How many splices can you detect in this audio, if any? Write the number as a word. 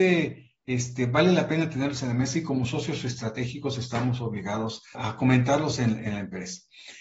one